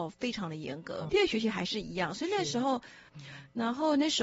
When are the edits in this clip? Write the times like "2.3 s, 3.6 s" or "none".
1.1 s, 3.1 s